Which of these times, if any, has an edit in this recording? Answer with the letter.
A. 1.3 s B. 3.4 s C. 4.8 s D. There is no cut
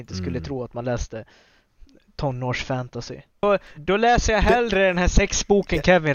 B